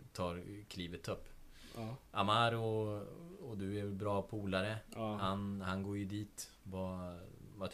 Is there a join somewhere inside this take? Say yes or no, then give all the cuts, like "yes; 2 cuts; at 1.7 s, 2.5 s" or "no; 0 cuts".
no; 0 cuts